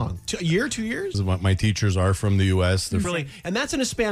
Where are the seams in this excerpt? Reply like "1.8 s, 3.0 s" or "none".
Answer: 1.1 s, 3.0 s